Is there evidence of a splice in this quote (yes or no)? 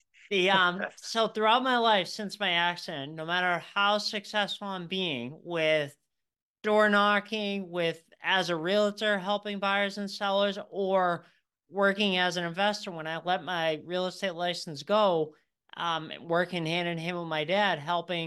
no